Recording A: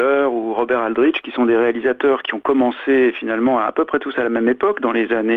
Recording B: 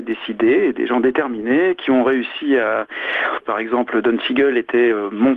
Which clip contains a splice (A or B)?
B